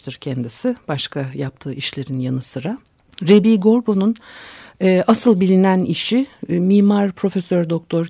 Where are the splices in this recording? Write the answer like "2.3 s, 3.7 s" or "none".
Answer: none